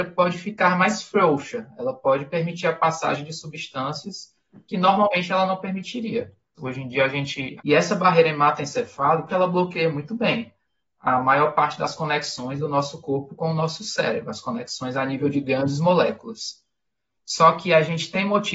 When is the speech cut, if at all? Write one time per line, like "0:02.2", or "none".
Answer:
0:06.6
0:07.6
0:09.3